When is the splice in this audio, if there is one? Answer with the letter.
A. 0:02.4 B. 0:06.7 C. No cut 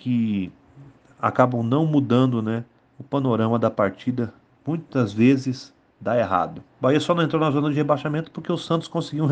B